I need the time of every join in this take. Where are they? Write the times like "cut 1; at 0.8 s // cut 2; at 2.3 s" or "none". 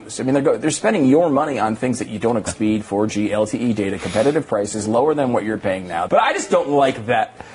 cut 1; at 2.5 s // cut 2; at 6.1 s